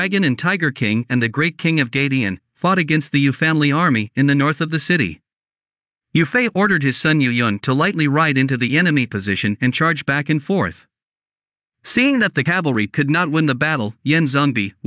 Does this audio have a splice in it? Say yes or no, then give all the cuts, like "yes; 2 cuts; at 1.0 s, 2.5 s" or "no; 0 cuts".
no; 0 cuts